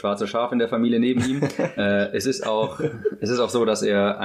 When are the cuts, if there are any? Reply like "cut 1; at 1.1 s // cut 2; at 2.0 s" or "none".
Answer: cut 1; at 1.8 s